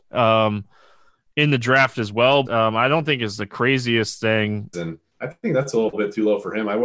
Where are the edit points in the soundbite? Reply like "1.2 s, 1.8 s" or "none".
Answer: 2.5 s, 4.7 s